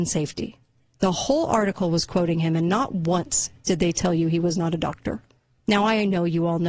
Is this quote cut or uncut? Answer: uncut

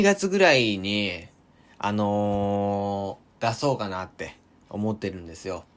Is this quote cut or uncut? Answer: uncut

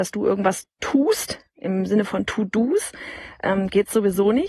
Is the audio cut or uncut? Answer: uncut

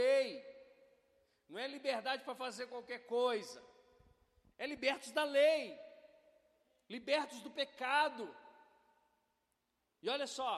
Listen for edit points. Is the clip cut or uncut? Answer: uncut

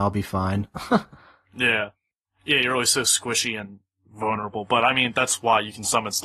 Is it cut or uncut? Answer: uncut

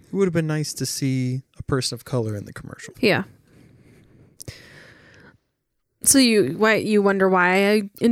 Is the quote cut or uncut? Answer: cut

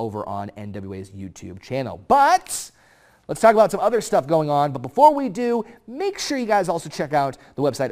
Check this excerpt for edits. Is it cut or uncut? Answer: uncut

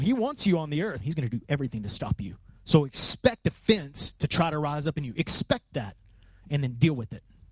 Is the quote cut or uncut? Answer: cut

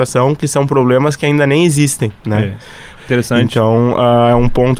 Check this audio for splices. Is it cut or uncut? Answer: cut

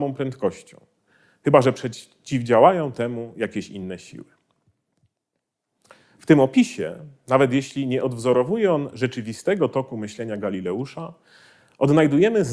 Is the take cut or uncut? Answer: uncut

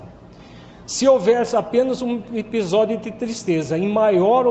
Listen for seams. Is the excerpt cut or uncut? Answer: uncut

